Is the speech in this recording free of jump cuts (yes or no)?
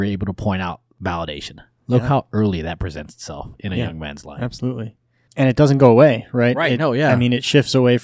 yes